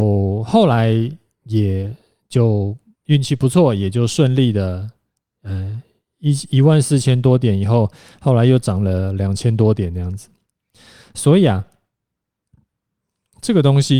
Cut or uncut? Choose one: uncut